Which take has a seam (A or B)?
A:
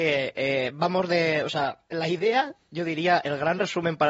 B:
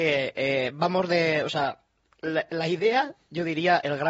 A